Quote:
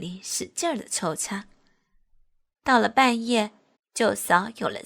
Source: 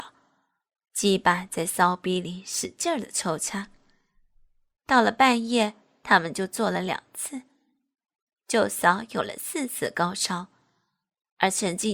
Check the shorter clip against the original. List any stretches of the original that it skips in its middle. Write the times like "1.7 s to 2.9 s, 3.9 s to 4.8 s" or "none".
6.0 s to 8.3 s